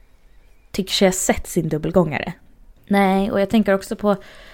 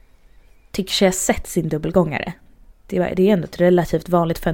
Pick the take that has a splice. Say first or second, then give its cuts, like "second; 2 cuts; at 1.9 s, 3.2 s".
first; 1 cut; at 2.8 s